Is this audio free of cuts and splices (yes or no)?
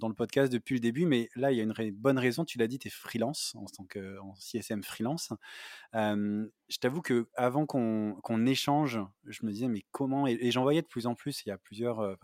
yes